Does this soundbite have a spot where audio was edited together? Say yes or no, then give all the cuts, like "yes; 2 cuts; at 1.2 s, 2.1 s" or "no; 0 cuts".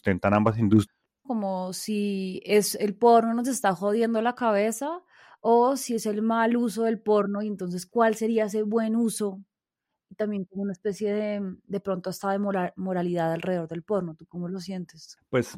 yes; 1 cut; at 1.2 s